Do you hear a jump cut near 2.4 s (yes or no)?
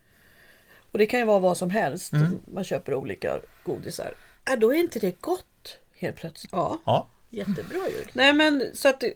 no